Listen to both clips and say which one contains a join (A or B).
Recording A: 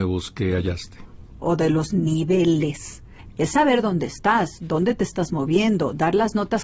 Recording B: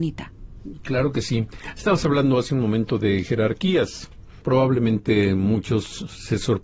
A